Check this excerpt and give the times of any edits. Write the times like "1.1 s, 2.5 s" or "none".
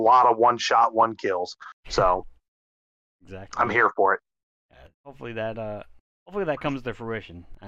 4.9 s